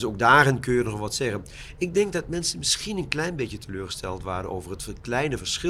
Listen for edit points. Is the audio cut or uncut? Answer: uncut